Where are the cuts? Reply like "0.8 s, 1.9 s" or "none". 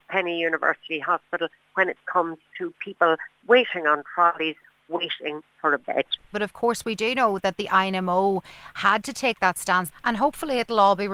6.3 s, 9.9 s